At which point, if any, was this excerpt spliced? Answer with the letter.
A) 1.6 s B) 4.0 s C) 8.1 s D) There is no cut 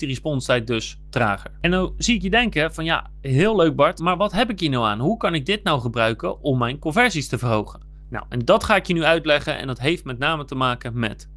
B